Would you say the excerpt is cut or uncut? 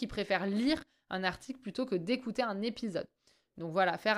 uncut